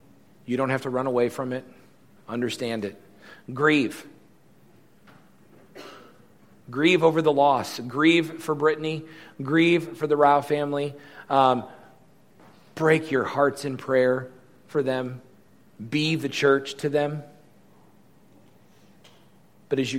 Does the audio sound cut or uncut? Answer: cut